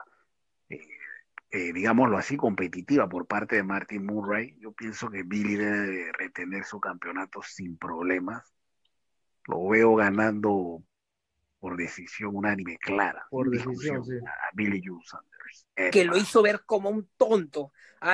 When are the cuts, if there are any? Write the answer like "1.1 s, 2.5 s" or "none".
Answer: 15.6 s